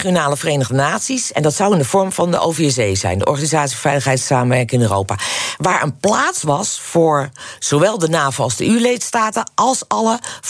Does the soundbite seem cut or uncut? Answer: uncut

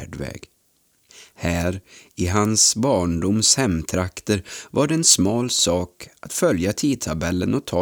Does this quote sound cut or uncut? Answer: uncut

